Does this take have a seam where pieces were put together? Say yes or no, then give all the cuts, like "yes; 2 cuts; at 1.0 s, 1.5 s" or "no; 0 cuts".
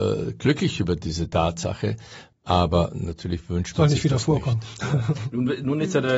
yes; 1 cut; at 2.3 s